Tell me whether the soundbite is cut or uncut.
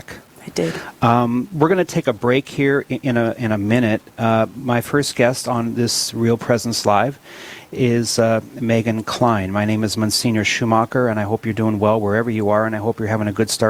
uncut